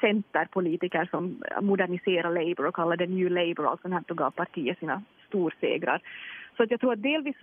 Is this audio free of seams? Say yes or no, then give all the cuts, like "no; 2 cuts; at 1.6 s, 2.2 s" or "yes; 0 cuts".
yes; 0 cuts